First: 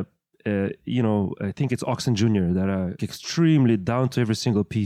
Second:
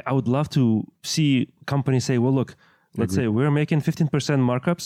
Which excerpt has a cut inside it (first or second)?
first